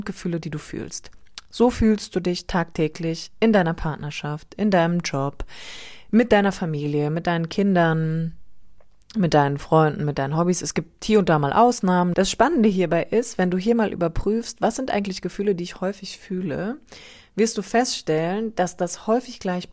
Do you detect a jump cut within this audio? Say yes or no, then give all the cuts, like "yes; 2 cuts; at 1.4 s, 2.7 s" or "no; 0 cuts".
yes; 1 cut; at 12.1 s